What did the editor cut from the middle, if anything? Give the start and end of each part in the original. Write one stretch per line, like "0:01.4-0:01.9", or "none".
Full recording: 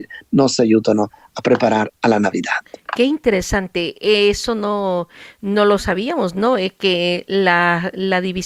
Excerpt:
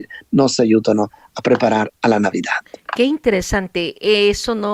none